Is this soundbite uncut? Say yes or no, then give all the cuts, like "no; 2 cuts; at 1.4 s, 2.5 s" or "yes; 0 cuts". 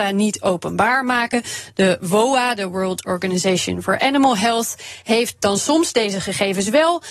yes; 0 cuts